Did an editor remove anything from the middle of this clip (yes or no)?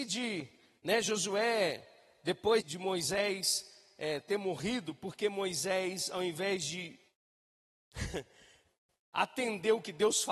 yes